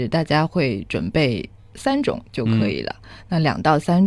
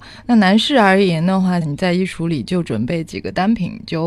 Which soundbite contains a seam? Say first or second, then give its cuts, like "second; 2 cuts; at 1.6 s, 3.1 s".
second; 1 cut; at 1.6 s